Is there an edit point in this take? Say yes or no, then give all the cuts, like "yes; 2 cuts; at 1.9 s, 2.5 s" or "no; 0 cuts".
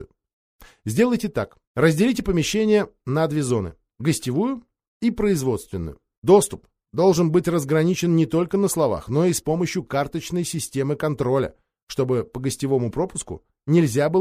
yes; 2 cuts; at 1.6 s, 6.2 s